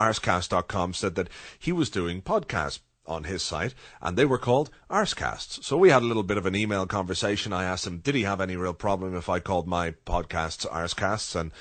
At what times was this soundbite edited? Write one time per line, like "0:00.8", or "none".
none